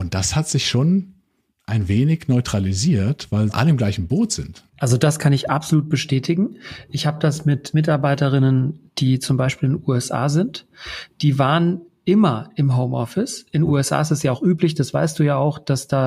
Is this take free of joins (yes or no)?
yes